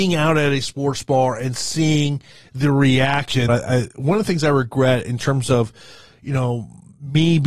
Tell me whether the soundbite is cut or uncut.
cut